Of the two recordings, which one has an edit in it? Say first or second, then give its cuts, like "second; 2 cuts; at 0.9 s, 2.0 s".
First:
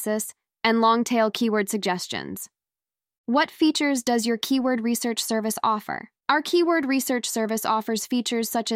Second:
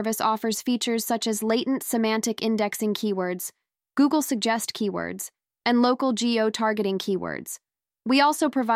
first; 1 cut; at 6.2 s